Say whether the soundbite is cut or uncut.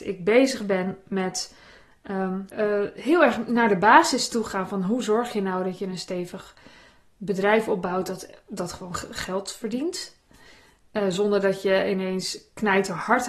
cut